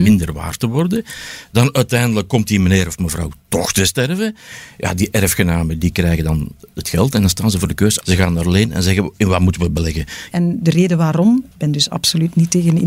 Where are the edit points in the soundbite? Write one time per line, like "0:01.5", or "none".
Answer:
0:08.0
0:10.3